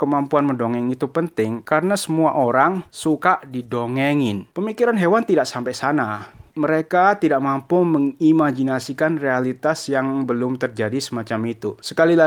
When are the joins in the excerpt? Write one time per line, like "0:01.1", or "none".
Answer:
0:04.5